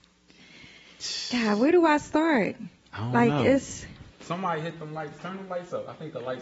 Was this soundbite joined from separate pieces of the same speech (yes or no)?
yes